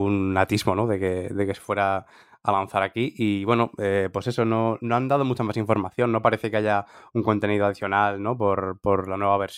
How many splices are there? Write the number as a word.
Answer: zero